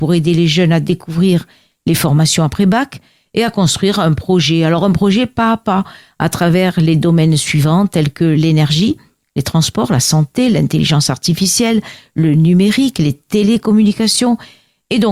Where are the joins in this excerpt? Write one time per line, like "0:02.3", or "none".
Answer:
none